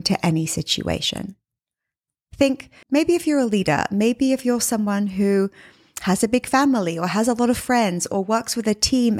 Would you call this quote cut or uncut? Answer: cut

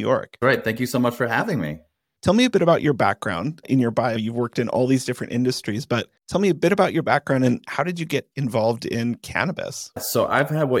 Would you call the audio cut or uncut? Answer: cut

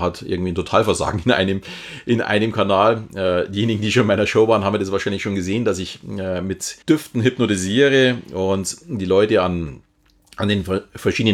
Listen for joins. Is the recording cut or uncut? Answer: cut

